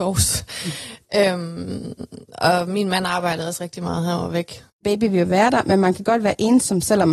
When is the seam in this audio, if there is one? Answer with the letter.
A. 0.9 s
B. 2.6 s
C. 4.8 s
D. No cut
C